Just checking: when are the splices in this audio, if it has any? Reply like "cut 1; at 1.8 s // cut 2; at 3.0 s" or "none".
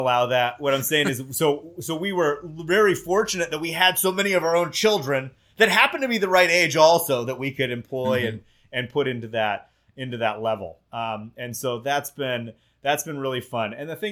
none